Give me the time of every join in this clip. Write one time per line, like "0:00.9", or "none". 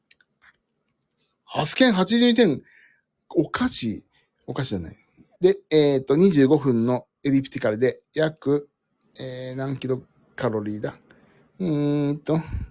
0:05.4